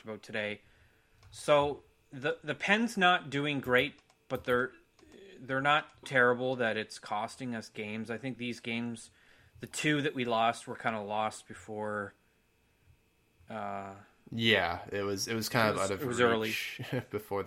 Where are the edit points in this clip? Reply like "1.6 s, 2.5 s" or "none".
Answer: 6.0 s